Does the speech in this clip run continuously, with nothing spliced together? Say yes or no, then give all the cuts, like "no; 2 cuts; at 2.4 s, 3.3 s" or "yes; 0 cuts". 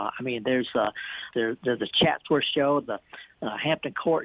no; 2 cuts; at 1.3 s, 2.8 s